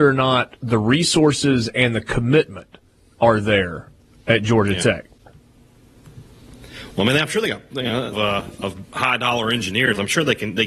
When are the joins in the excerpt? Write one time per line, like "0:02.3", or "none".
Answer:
0:08.1